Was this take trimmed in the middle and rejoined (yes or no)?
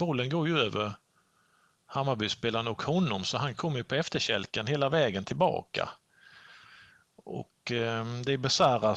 no